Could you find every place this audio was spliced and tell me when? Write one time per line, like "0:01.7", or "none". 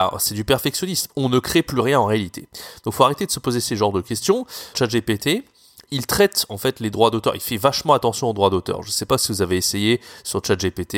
0:04.7